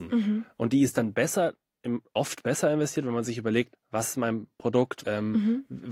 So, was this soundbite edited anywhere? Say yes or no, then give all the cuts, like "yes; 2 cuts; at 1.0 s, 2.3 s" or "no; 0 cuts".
yes; 2 cuts; at 3.7 s, 5.0 s